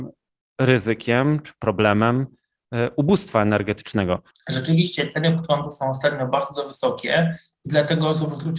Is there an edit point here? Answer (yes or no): yes